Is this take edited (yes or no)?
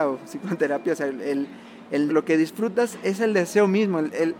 yes